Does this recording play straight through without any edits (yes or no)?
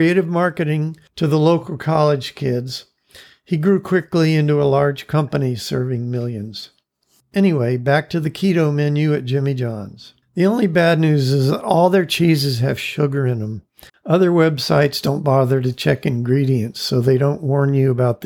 no